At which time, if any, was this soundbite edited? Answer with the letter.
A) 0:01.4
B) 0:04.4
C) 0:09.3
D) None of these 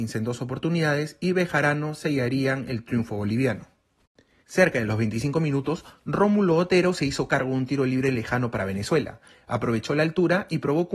B